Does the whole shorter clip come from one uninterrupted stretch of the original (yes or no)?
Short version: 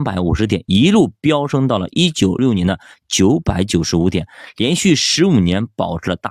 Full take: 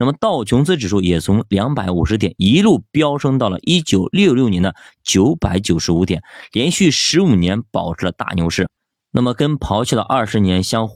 no